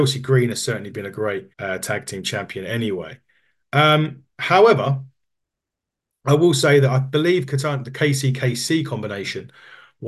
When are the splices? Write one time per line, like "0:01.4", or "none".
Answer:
0:01.5